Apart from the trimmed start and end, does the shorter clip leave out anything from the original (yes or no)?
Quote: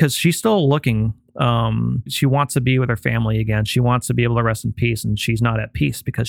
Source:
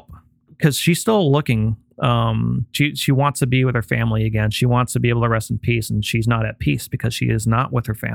yes